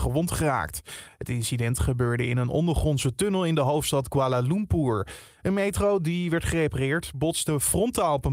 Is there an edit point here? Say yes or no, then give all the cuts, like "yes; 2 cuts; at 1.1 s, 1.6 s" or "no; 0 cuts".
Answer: no; 0 cuts